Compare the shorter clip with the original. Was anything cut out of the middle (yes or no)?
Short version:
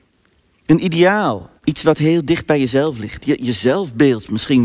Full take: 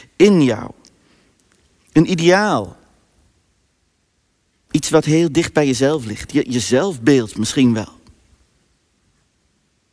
yes